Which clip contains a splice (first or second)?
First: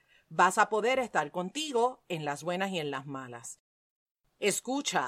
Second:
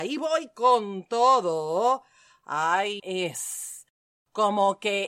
second